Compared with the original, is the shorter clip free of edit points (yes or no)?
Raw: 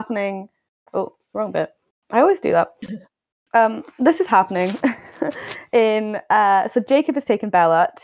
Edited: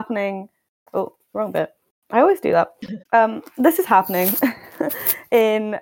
no